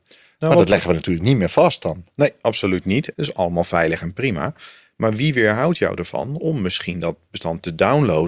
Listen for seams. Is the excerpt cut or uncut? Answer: cut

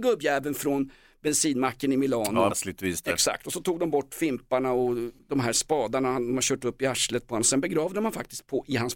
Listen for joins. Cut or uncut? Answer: cut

